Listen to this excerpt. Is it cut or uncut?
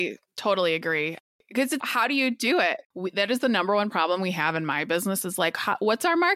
cut